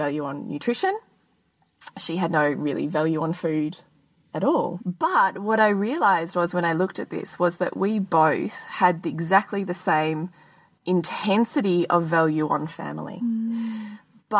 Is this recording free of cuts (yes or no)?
no